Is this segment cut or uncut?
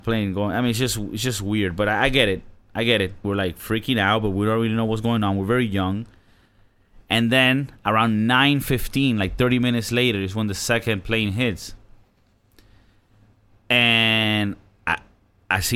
cut